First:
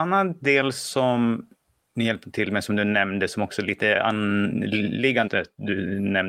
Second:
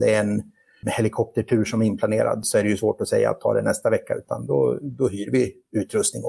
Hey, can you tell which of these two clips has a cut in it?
first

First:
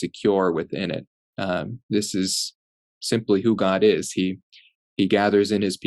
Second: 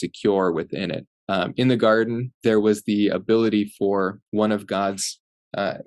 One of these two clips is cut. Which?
second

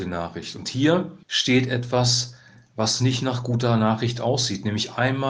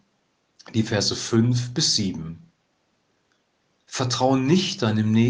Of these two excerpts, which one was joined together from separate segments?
first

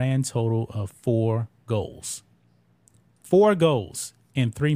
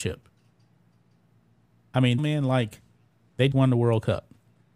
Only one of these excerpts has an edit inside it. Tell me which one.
second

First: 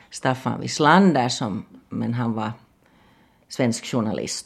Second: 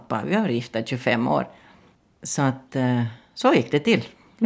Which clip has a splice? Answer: first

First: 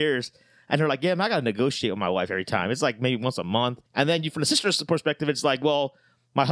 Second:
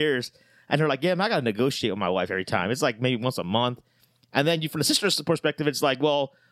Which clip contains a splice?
first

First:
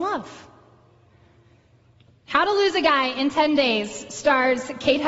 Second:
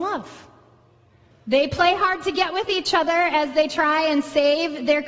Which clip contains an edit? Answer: second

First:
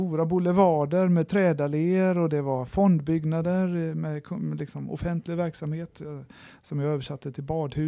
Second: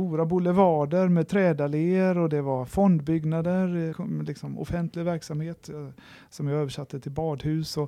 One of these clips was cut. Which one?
second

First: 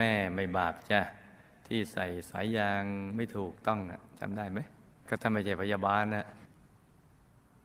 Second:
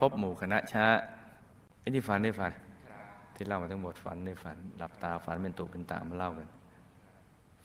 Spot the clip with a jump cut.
second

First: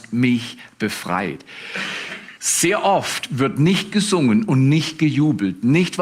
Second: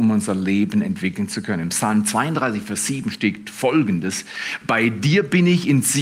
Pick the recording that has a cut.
first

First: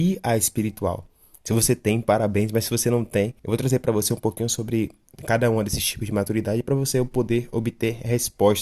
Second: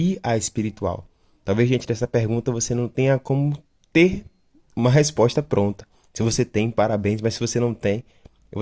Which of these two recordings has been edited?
first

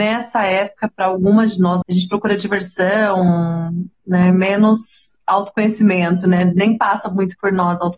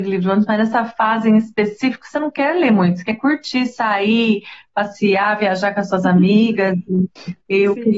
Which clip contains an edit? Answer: first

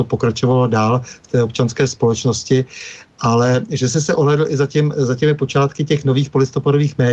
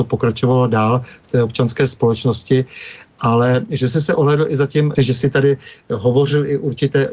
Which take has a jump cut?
second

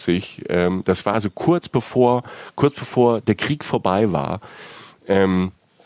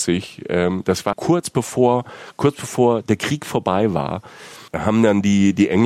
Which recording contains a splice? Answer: second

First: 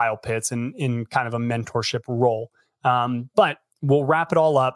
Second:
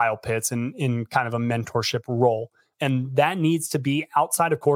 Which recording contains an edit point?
second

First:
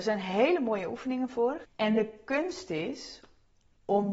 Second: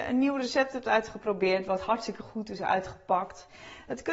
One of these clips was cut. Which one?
first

